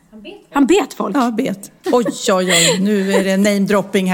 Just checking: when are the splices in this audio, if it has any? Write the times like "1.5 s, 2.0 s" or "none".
1.8 s